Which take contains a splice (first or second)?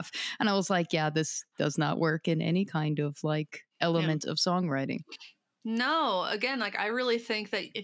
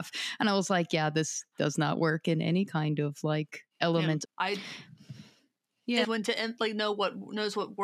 second